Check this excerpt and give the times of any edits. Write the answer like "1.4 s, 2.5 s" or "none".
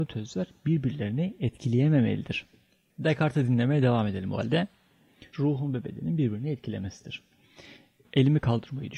2.9 s, 5.3 s

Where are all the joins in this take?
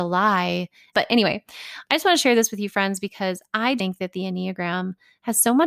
0.9 s, 3.8 s

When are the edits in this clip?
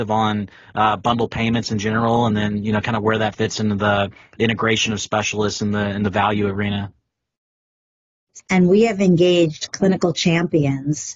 8.4 s

